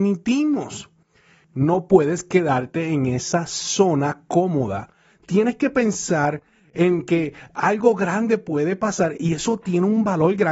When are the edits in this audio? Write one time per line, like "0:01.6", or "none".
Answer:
0:01.4
0:05.1